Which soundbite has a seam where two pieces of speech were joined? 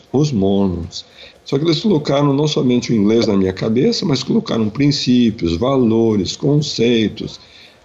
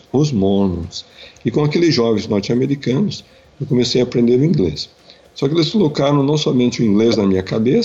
first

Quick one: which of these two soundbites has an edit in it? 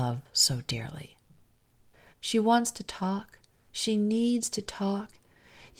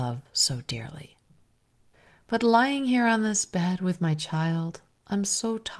first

